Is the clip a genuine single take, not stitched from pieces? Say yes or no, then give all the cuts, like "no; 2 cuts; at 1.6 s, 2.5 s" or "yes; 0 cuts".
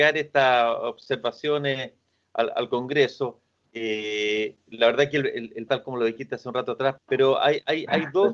no; 3 cuts; at 3.6 s, 5.7 s, 7.0 s